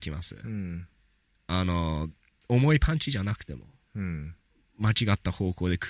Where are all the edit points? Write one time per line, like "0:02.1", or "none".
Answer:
none